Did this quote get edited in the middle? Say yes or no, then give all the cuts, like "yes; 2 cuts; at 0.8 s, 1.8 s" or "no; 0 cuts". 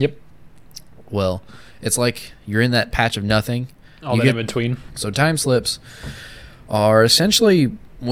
yes; 1 cut; at 4.9 s